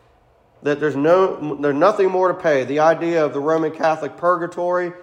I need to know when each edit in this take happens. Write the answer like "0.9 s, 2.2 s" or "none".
none